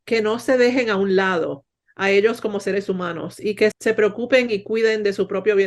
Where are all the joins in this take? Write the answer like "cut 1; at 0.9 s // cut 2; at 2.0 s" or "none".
cut 1; at 3.7 s